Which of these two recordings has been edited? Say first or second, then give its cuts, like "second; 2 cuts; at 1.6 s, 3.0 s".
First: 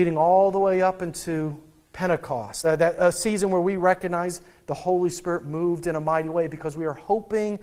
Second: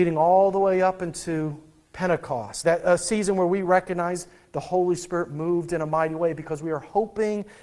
second; 1 cut; at 2.6 s